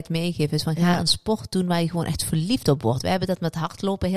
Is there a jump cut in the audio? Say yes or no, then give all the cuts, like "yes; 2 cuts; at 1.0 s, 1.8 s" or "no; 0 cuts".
no; 0 cuts